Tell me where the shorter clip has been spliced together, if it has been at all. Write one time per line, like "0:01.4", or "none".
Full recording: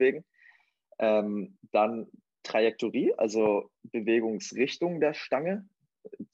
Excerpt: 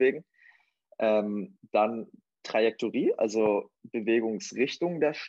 none